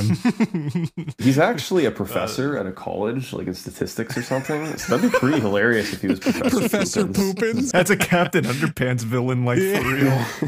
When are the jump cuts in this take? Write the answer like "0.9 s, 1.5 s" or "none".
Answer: 7.7 s